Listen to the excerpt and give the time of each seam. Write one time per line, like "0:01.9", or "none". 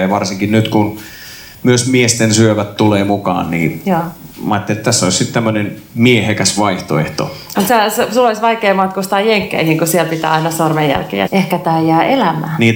0:07.6
0:11.3